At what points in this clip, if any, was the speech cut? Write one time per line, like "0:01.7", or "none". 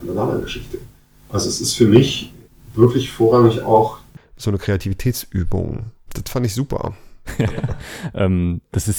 0:06.1
0:07.2